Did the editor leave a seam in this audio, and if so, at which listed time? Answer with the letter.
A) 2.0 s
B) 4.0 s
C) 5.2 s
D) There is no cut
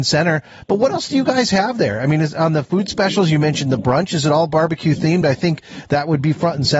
D